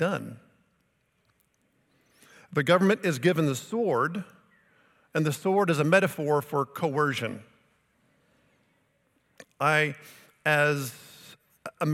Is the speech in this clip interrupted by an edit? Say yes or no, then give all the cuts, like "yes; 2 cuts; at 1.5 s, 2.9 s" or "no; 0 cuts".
yes; 1 cut; at 9.4 s